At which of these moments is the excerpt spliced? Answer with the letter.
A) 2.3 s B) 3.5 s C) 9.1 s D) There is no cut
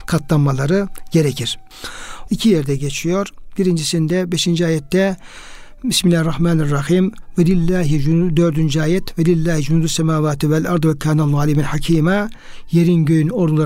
A